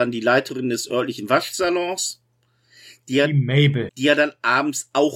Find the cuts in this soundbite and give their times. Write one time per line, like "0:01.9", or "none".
0:03.9